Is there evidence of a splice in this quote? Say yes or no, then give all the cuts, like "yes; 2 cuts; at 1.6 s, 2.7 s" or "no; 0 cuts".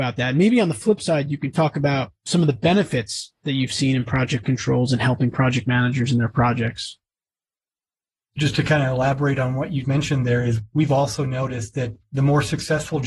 yes; 1 cut; at 9.8 s